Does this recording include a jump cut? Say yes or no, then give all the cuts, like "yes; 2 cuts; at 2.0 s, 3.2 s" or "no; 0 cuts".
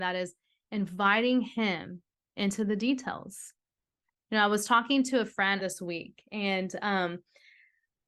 yes; 1 cut; at 5.6 s